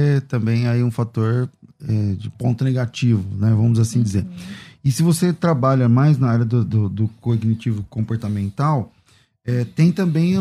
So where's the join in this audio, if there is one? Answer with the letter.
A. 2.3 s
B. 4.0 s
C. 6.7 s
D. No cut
A